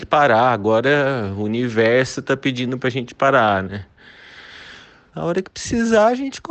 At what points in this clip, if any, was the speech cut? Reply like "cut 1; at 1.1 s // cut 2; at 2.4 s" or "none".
cut 1; at 5.1 s